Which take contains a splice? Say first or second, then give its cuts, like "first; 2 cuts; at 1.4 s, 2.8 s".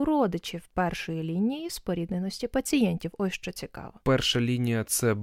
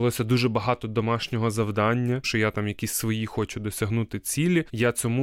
second; 1 cut; at 2.2 s